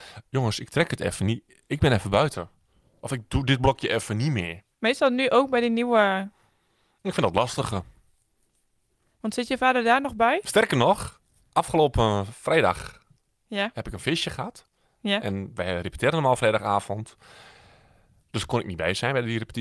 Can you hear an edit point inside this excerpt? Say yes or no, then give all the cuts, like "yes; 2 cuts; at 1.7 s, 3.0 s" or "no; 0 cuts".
yes; 2 cuts; at 4.7 s, 10.4 s